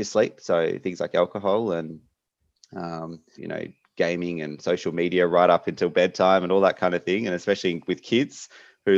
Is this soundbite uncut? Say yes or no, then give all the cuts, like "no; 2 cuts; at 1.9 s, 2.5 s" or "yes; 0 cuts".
no; 1 cut; at 3.4 s